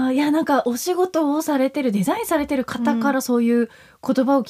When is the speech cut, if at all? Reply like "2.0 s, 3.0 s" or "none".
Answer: none